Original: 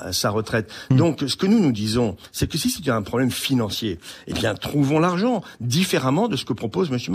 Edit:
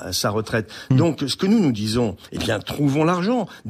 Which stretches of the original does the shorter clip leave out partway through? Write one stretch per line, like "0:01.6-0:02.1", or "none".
0:02.3-0:04.2